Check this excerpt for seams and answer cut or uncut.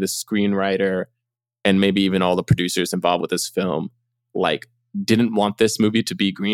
uncut